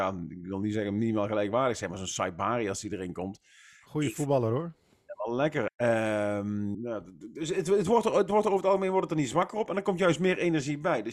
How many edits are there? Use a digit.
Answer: 2